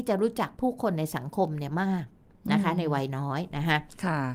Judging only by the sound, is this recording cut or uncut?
uncut